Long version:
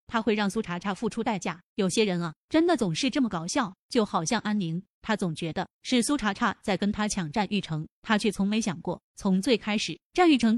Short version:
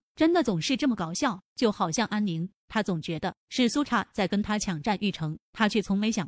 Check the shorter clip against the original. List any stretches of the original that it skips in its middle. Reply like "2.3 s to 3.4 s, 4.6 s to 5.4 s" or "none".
6.2 s to 6.3 s